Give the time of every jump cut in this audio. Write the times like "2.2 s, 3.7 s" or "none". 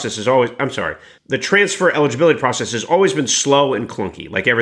1.2 s